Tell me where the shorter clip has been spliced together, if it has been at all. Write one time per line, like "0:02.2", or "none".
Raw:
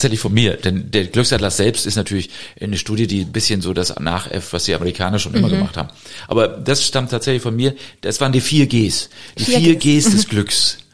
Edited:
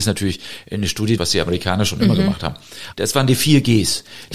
0:01.2
0:02.9